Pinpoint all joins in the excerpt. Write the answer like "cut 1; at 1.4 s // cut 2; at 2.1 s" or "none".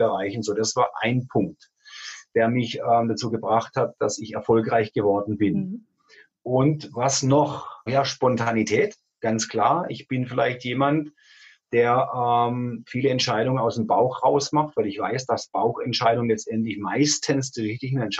cut 1; at 7.9 s